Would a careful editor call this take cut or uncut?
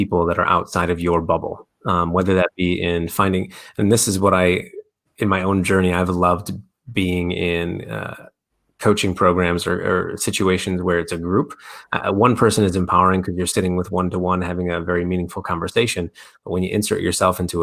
uncut